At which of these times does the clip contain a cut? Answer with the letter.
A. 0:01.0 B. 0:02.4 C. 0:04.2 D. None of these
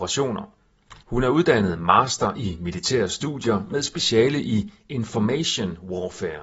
A